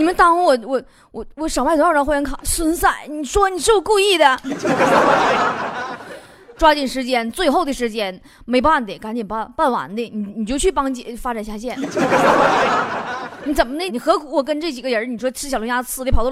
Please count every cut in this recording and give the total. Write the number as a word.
three